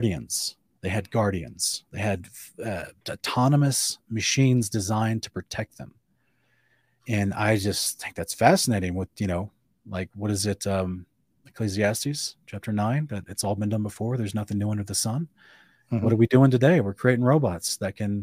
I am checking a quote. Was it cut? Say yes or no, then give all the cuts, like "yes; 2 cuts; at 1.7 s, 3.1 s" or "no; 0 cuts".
no; 0 cuts